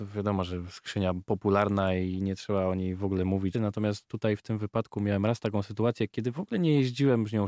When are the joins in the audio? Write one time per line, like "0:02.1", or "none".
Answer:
0:03.5